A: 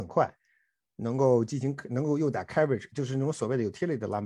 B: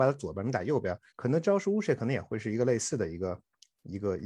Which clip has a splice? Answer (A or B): B